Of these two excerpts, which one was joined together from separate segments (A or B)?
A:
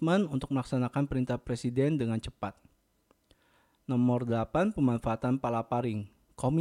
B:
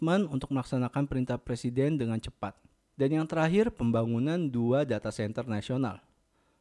B